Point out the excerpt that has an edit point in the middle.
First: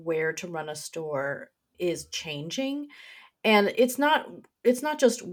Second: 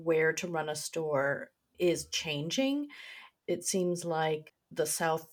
second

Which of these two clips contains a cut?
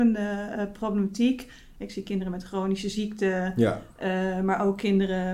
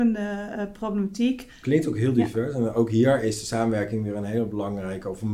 second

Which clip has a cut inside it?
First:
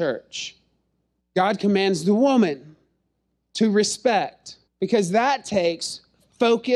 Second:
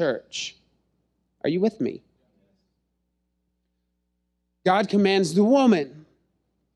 first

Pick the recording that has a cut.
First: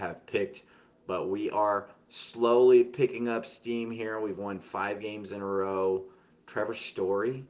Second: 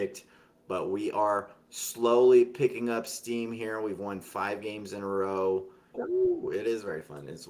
second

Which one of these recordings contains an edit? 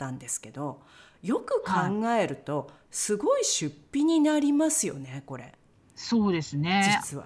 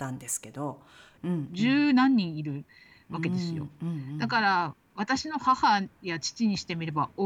second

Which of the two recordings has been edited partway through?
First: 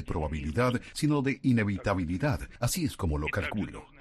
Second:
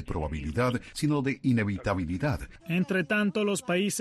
second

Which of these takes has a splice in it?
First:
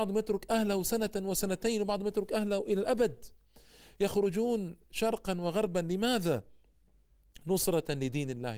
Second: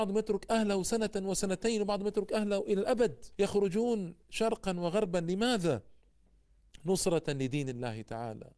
second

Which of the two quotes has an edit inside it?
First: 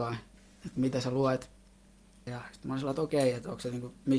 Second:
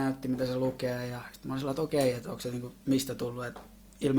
first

